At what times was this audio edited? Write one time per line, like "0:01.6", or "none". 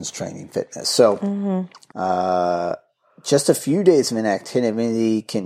0:01.9